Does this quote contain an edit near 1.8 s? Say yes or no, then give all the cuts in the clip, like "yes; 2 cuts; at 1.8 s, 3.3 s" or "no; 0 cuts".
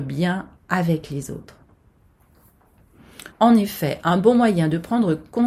no; 1 cut; at 3.3 s